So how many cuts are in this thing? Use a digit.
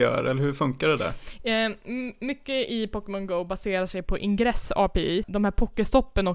1